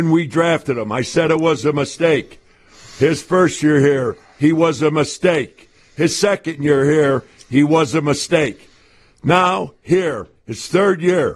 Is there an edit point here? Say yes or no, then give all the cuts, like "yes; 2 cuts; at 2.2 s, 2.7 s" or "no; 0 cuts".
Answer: no; 0 cuts